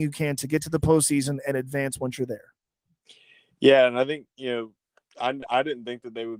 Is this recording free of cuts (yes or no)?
yes